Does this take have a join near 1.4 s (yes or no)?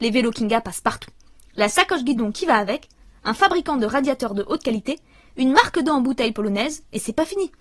no